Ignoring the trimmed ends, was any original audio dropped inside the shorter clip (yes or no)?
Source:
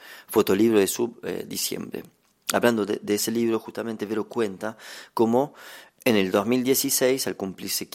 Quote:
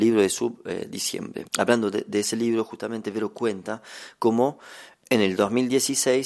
yes